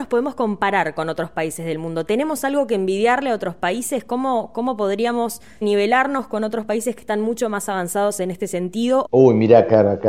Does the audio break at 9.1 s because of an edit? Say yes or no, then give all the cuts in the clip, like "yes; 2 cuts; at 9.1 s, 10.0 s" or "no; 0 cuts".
yes; 2 cuts; at 5.6 s, 9.1 s